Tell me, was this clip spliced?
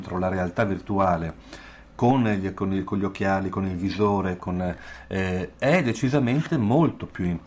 no; 0 cuts

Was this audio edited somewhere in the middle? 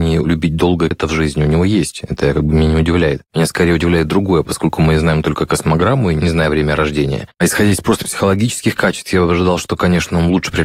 yes; 1 cut; at 0.9 s

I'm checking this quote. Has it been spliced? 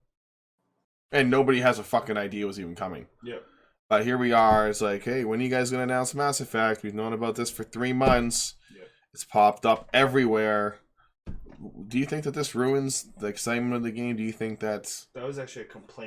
no; 0 cuts

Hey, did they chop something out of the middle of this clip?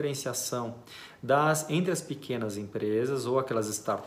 no; 0 cuts

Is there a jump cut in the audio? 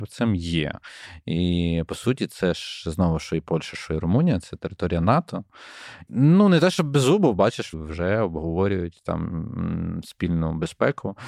yes; 2 cuts; at 6.1 s, 7.7 s

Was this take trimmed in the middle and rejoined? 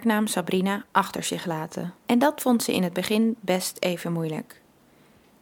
yes; 1 cut; at 2.0 s

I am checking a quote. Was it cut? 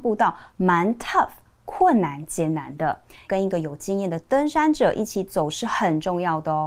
yes; 1 cut; at 3.2 s

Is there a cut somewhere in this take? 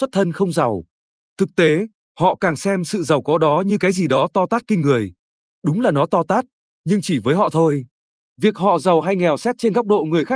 yes; 1 cut; at 2.1 s

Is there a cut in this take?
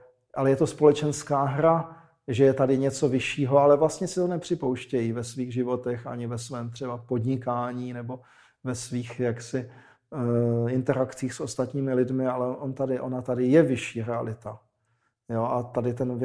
no; 0 cuts

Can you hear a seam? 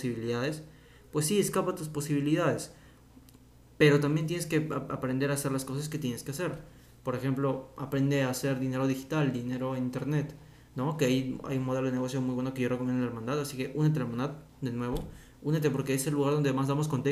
no; 0 cuts

